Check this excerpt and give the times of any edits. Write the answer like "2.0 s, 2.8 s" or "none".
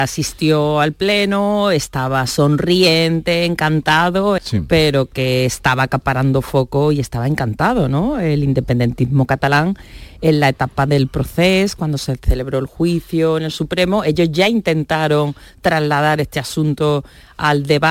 4.4 s